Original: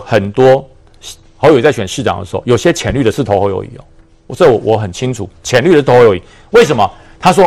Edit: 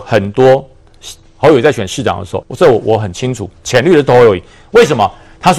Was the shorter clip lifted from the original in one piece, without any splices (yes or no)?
no